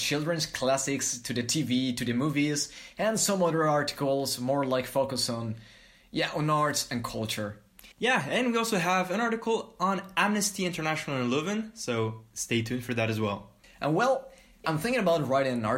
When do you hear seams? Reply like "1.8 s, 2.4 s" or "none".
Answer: 7.9 s, 14.6 s